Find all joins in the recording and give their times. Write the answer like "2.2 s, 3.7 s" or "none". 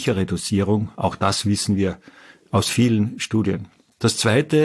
none